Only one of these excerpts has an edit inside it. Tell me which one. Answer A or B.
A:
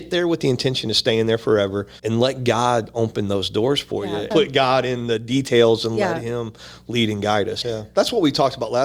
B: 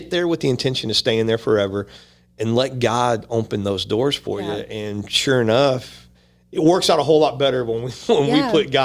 A